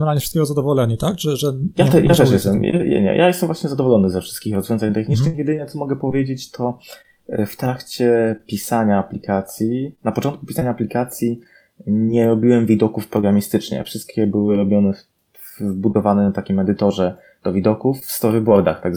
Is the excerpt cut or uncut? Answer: uncut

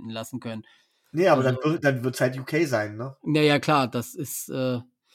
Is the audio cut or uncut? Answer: uncut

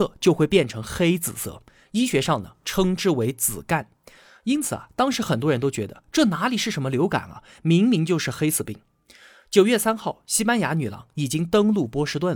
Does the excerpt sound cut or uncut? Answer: uncut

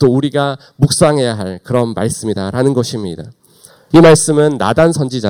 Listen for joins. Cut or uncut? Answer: cut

